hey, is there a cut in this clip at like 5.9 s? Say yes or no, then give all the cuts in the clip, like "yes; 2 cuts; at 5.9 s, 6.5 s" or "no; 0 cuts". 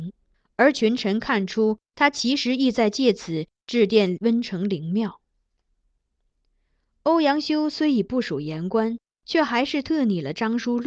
no; 0 cuts